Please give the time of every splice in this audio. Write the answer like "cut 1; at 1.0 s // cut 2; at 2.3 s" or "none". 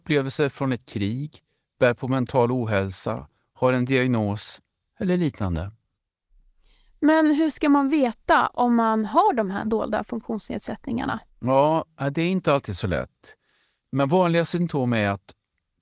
none